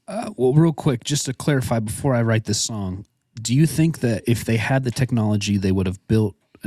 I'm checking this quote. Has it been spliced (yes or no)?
no